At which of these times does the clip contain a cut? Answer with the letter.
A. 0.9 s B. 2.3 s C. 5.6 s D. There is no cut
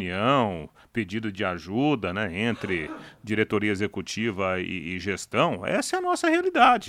D